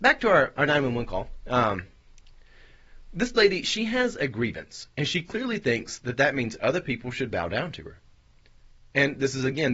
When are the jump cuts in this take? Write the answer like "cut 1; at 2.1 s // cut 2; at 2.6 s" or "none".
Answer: none